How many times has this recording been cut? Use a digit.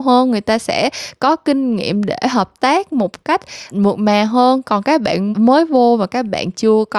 2